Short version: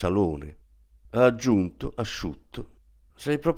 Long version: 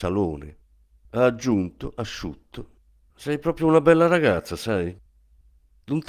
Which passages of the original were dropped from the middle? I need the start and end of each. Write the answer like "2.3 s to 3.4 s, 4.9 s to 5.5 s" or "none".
none